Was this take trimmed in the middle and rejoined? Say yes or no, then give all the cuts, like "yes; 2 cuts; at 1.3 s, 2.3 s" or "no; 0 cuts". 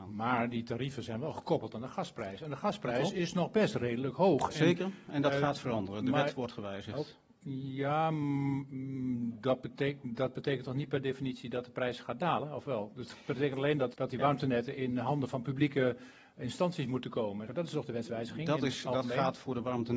yes; 2 cuts; at 13.9 s, 17.5 s